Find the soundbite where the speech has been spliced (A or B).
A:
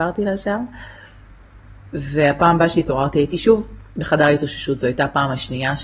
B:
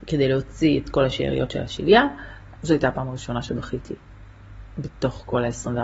B